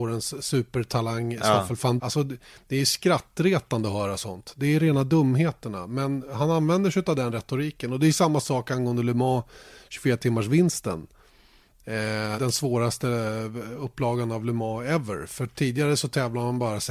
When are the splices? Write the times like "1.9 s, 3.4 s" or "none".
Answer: 2.0 s, 12.4 s